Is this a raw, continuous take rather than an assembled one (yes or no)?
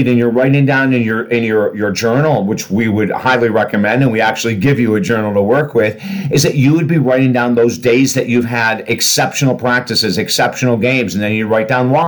yes